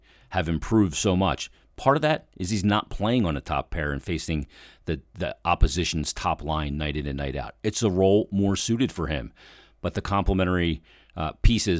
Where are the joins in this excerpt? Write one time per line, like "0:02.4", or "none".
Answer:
none